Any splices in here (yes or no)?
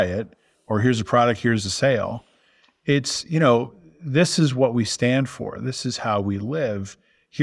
no